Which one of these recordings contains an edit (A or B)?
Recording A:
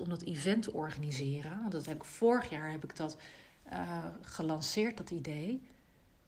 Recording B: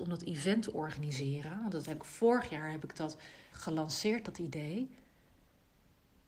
B